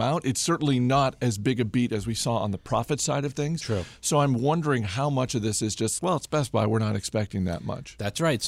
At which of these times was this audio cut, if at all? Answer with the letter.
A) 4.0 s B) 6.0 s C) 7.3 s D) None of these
B